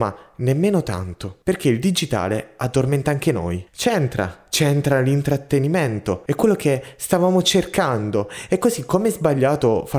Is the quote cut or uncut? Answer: cut